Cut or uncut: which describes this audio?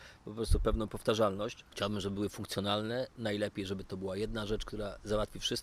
uncut